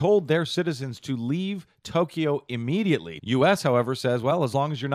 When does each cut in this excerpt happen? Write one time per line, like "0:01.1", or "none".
0:03.2

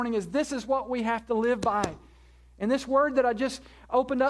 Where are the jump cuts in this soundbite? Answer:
none

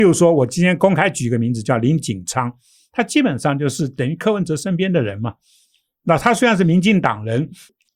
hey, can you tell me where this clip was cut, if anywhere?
none

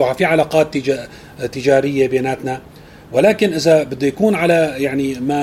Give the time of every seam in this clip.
none

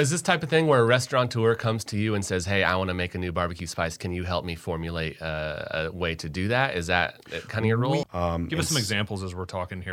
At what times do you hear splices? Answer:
0:08.0

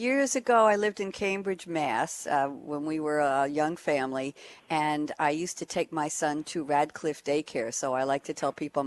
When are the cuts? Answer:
none

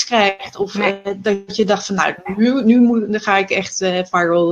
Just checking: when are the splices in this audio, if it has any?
none

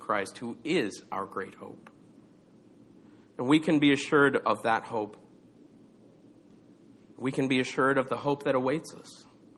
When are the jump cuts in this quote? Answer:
none

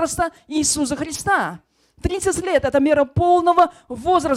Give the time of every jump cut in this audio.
none

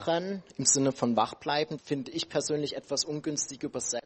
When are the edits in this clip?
0:01.8

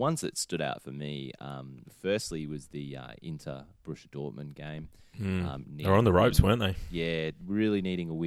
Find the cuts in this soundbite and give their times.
0:05.6

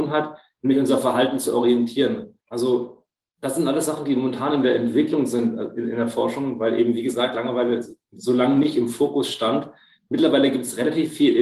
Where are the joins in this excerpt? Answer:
0:02.4

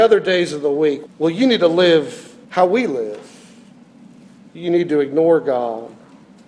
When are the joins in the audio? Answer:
0:01.1
0:02.4

